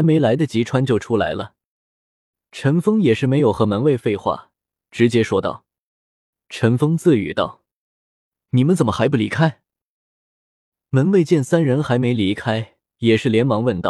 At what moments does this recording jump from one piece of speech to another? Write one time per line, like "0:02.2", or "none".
0:01.8
0:06.3